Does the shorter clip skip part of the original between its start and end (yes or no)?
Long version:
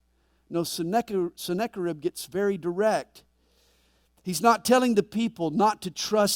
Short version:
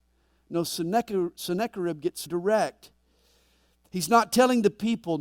yes